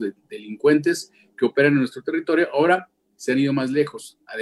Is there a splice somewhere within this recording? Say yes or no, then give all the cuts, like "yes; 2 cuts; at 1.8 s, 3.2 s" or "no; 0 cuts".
no; 0 cuts